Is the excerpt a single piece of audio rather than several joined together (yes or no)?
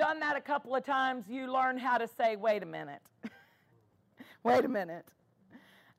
yes